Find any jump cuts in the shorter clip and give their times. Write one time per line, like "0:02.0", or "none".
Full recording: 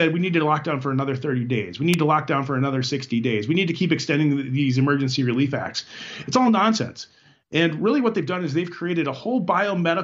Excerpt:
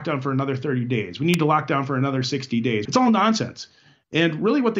0:02.9

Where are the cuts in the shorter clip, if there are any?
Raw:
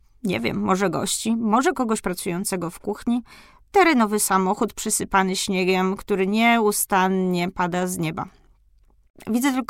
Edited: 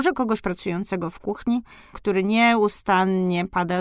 0:01.9

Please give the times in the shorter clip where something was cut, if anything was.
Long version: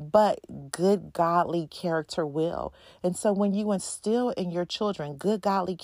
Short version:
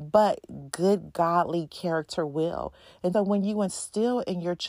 0:03.1

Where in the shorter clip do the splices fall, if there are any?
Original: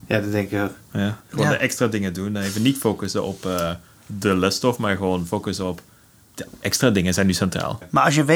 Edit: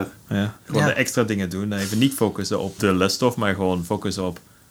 0:02.8

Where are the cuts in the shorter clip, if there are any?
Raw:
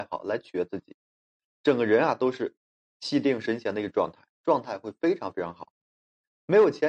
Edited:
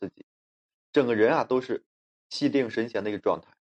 none

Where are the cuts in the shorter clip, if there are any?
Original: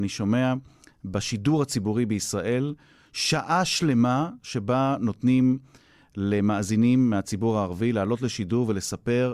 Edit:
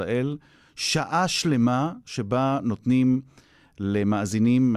none

